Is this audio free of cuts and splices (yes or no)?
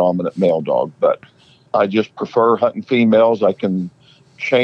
no